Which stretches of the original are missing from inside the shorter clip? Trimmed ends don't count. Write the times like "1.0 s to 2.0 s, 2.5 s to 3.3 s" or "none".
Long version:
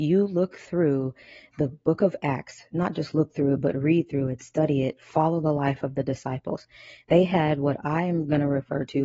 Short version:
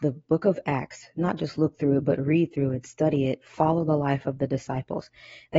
none